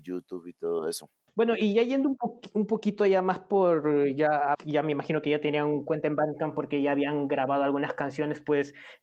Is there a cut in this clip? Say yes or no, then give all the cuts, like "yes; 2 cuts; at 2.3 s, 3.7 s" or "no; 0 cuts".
yes; 1 cut; at 4.5 s